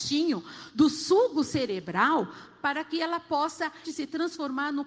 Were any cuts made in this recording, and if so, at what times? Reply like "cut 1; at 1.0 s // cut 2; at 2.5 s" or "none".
cut 1; at 3.8 s

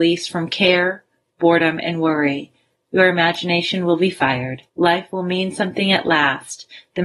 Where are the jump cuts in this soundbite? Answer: cut 1; at 4.7 s

